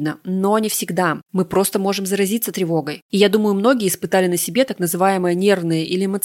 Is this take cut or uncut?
cut